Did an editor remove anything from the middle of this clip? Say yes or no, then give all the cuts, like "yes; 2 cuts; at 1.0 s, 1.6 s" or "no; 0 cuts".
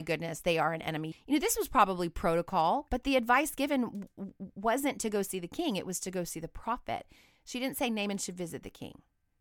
yes; 2 cuts; at 1.1 s, 2.9 s